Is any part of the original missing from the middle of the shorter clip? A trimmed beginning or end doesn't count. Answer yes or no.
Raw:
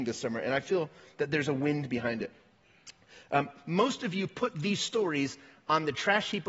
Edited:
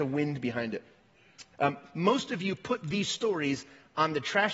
yes